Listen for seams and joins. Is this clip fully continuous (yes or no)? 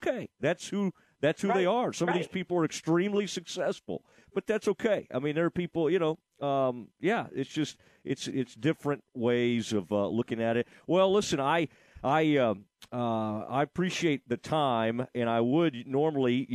yes